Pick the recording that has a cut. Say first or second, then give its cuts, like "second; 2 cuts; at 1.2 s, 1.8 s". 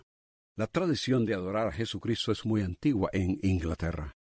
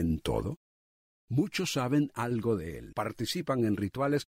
second; 1 cut; at 2.9 s